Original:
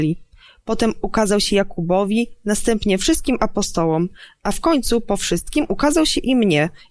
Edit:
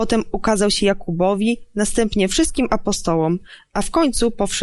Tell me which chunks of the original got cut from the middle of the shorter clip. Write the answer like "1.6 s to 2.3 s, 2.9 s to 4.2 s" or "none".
none